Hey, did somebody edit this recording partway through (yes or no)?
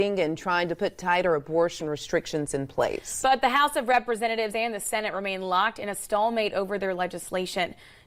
no